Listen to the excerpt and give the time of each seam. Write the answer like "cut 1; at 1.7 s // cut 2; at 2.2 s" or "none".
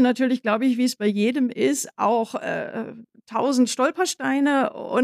none